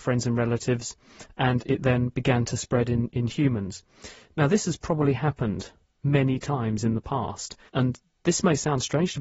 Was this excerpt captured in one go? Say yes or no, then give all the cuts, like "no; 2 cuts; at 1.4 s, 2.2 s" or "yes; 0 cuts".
no; 1 cut; at 7.7 s